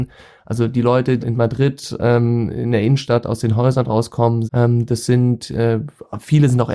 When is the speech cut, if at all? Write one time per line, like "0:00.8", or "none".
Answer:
0:01.2
0:04.5